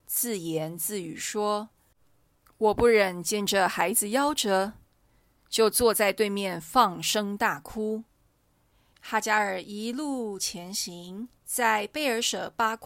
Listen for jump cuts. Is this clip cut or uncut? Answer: cut